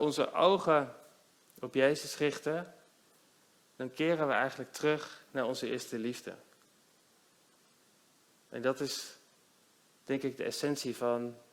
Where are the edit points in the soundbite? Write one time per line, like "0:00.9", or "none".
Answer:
none